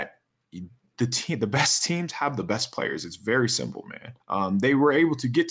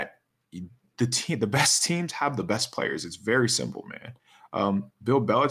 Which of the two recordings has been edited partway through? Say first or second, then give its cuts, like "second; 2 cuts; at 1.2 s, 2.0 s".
first; 1 cut; at 4.2 s